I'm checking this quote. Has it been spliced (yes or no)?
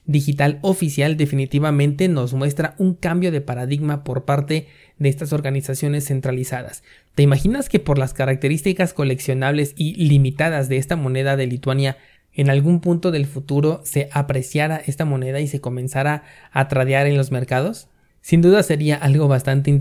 no